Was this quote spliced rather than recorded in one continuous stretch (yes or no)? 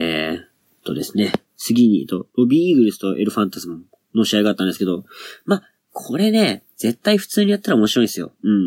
yes